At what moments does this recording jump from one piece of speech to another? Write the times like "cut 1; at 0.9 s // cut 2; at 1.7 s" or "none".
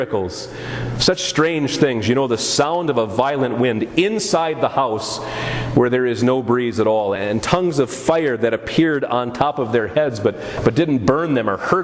none